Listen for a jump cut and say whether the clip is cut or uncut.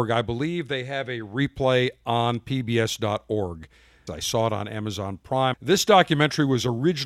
cut